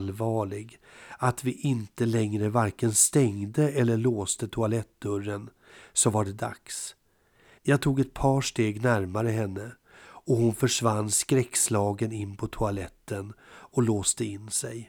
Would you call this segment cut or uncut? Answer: cut